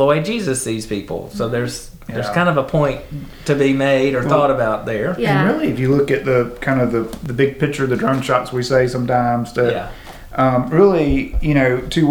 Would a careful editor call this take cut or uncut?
uncut